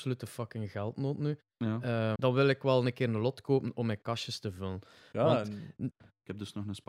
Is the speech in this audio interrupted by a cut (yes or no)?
yes